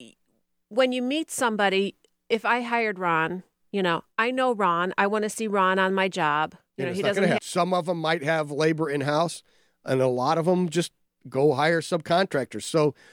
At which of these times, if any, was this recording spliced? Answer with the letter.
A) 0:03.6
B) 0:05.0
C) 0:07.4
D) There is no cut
C